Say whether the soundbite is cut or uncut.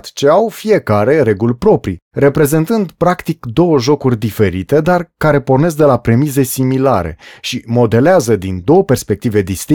uncut